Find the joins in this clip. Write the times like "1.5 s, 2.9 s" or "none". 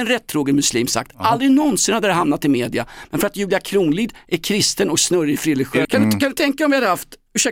5.8 s